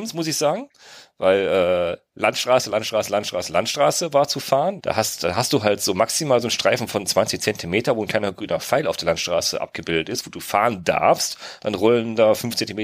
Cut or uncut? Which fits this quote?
cut